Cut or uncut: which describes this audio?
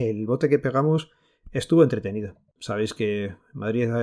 cut